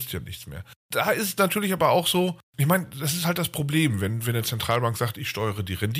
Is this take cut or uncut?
uncut